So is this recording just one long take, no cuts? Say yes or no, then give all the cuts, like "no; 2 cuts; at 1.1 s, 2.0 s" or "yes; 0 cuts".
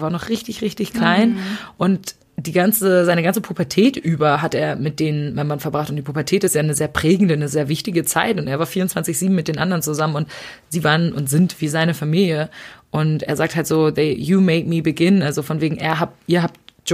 yes; 0 cuts